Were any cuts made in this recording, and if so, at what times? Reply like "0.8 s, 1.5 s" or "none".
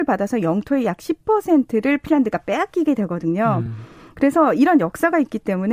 none